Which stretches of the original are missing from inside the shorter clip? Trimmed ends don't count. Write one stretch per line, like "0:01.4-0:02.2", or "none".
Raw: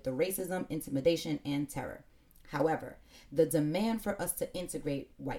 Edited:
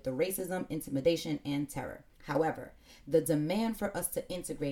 0:02.1-0:02.4